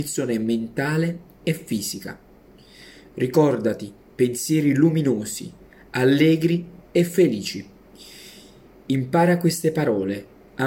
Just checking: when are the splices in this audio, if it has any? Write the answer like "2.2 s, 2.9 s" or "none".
none